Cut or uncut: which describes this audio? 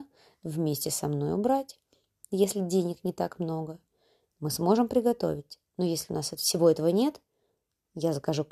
cut